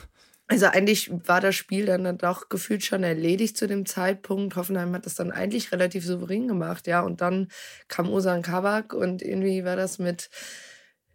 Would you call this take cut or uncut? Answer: uncut